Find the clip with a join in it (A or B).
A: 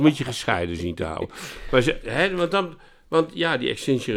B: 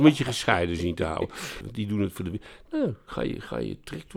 B